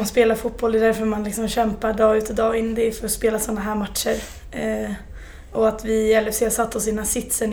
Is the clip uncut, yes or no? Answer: yes